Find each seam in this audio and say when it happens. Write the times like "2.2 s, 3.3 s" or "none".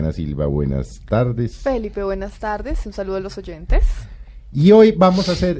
none